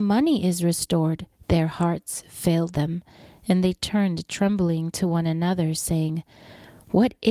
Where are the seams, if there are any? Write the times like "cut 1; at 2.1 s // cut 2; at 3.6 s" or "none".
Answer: cut 1; at 1.4 s